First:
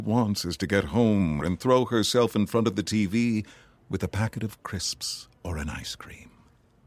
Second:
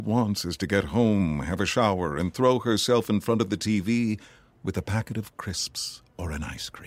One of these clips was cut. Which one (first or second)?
first